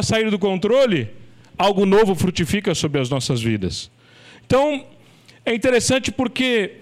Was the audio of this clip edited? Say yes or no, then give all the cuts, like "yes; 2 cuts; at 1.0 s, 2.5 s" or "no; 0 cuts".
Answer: no; 0 cuts